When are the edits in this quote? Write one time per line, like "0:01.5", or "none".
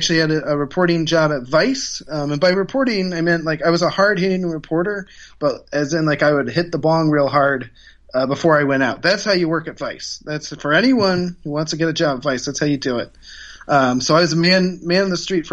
none